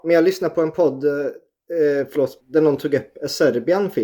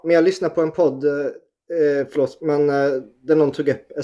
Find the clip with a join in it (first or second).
first